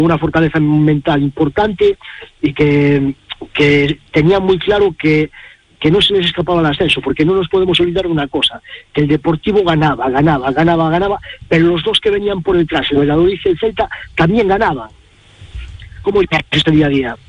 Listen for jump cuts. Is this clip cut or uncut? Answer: cut